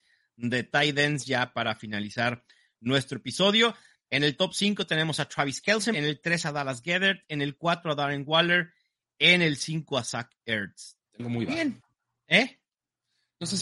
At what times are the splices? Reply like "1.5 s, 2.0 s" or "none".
5.9 s, 11.0 s